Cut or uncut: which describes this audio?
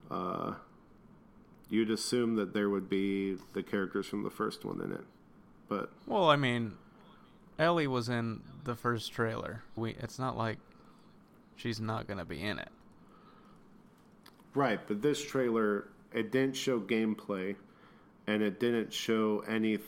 cut